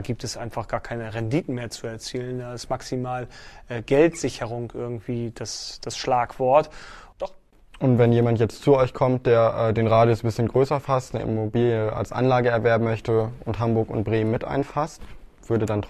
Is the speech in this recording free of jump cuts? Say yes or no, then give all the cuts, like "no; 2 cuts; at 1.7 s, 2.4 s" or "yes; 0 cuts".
no; 1 cut; at 7.1 s